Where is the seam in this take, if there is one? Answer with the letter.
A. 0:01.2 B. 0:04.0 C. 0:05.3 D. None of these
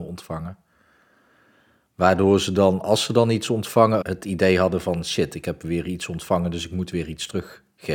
B